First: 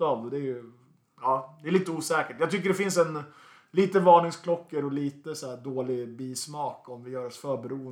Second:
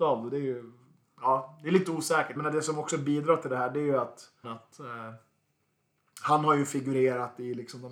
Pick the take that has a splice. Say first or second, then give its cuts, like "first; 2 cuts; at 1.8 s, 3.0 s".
second; 2 cuts; at 2.4 s, 4.4 s